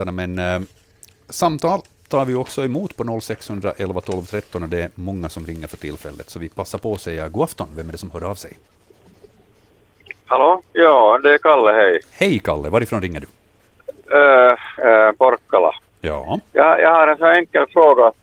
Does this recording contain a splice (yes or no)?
yes